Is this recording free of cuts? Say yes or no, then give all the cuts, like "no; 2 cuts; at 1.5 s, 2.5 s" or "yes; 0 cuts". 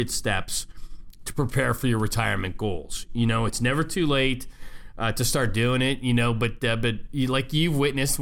yes; 0 cuts